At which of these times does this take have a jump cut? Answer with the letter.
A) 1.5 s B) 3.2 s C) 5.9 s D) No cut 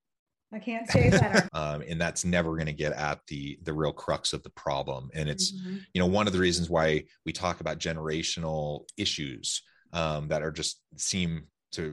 A